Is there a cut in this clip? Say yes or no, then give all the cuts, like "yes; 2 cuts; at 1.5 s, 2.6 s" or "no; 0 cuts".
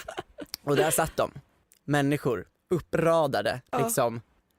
no; 0 cuts